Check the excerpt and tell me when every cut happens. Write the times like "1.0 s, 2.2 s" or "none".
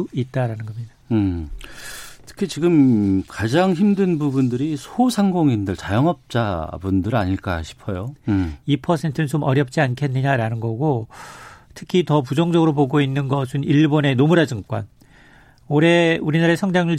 8.2 s